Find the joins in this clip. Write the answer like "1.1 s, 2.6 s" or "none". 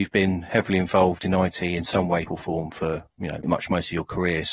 2.2 s, 3.4 s